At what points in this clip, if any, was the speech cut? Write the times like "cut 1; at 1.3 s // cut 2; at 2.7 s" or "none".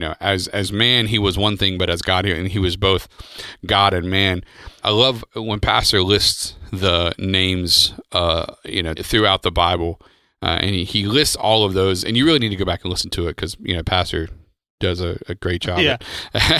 cut 1; at 4.8 s // cut 2; at 9.0 s

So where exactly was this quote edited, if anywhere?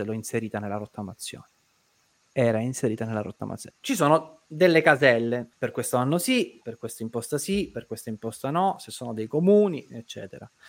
cut 1; at 3.7 s // cut 2; at 5.5 s // cut 3; at 6.6 s

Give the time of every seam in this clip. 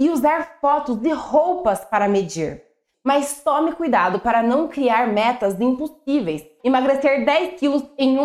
cut 1; at 2.9 s // cut 2; at 6.6 s

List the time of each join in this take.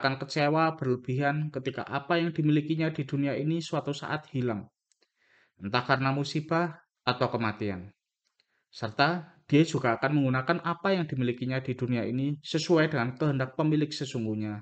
cut 1; at 6.9 s

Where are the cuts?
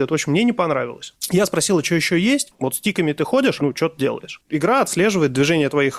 cut 1; at 2.5 s // cut 2; at 3.6 s

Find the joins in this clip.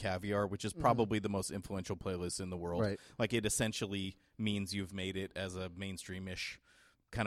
none

